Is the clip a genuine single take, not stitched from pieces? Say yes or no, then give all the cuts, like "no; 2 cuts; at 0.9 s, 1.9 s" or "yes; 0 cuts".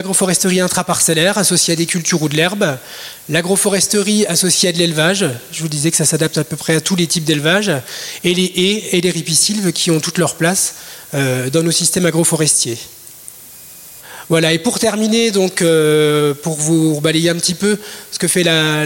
yes; 0 cuts